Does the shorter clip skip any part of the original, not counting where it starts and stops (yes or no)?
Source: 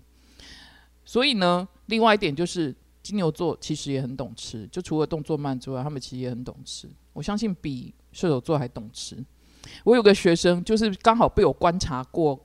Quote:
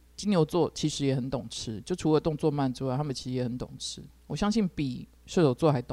no